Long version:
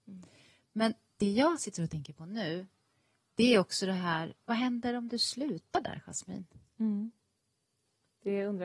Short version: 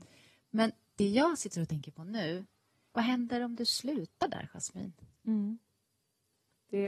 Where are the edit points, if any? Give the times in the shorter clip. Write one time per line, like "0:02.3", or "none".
0:02.9

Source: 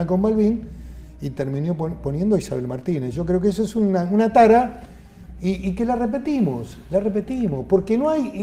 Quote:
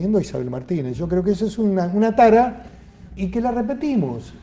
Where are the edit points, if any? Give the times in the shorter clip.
0:03.2

